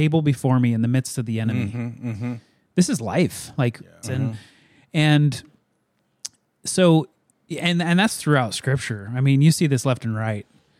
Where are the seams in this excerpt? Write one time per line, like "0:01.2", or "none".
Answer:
0:04.0

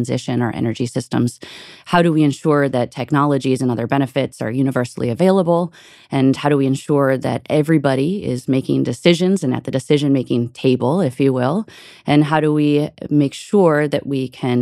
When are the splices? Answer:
none

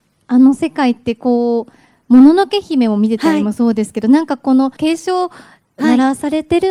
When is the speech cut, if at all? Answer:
0:04.8

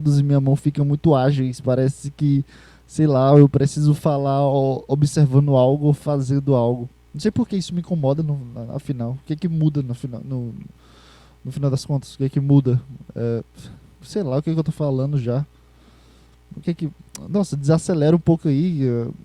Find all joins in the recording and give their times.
0:07.1

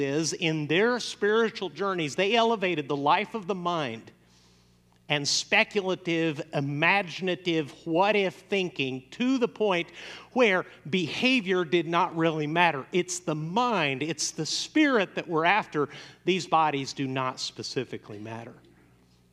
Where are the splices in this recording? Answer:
none

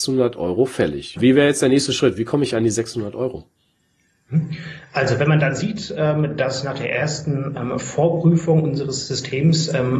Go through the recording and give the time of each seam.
0:01.2

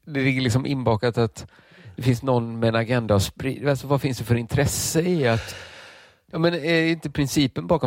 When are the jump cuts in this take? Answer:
0:06.3

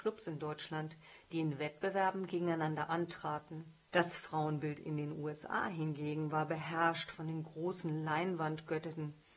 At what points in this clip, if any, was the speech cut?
0:03.9

